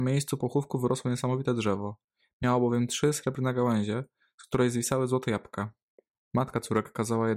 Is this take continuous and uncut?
yes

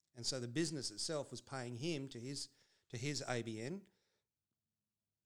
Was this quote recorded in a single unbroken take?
yes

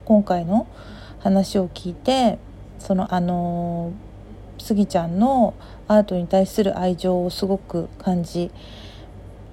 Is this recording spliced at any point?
yes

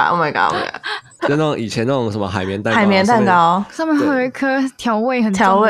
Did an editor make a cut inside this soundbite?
yes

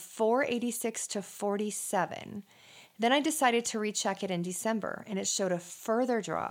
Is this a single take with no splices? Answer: yes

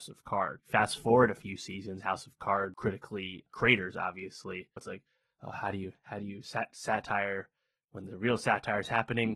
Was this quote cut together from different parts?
yes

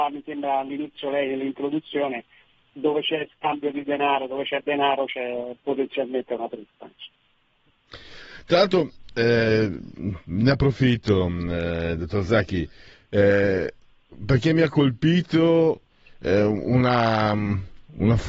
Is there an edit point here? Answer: no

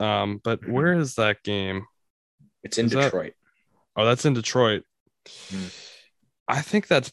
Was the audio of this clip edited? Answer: no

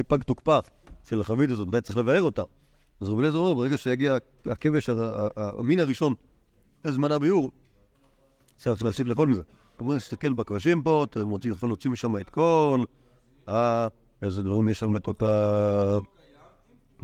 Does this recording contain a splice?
yes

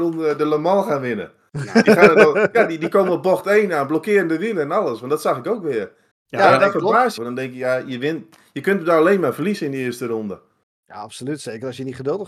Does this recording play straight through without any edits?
no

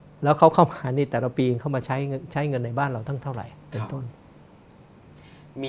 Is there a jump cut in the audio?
no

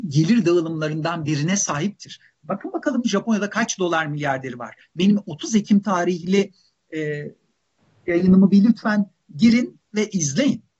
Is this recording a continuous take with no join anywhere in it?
yes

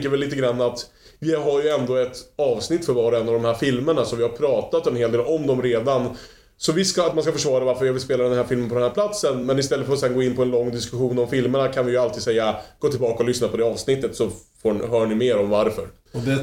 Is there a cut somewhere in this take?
no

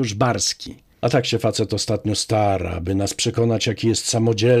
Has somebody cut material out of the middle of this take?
yes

